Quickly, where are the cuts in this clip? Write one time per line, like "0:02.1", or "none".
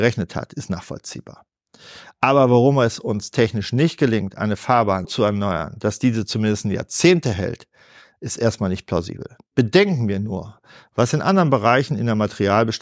0:05.0
0:09.5

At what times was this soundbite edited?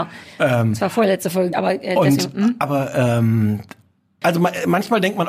0:01.5
0:04.2

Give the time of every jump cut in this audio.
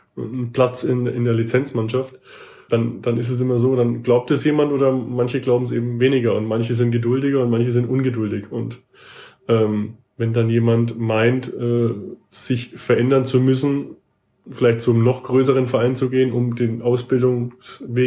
0:02.7

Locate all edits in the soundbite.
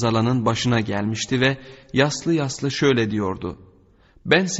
none

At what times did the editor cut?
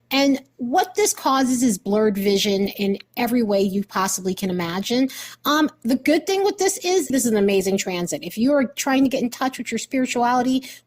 0:07.1

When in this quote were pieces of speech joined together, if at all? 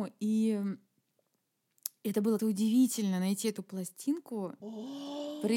0:02.4
0:04.6

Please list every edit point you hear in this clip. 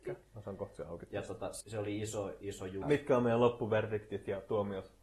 0:01.6
0:02.8

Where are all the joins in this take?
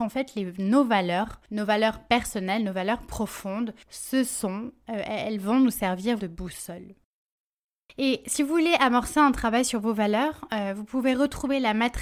0:06.2

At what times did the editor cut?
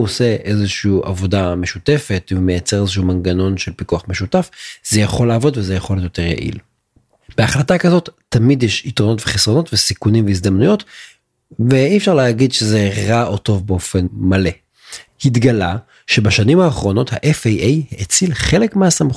0:15.1

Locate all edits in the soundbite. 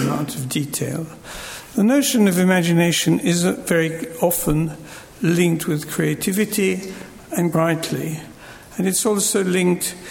0:07.5

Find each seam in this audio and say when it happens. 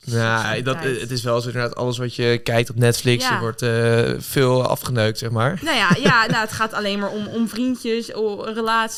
none

